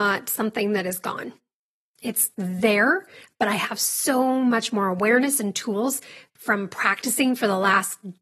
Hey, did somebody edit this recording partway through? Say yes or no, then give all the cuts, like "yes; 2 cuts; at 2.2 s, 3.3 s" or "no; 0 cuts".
no; 0 cuts